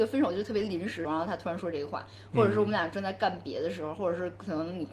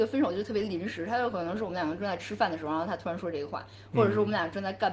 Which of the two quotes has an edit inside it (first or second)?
first